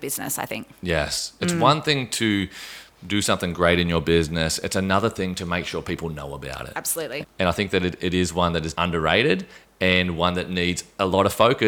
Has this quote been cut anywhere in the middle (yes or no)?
yes